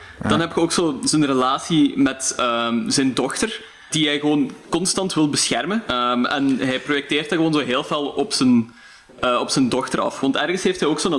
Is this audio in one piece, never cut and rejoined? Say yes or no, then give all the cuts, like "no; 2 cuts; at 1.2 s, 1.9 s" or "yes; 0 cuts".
no; 2 cuts; at 3.9 s, 5.9 s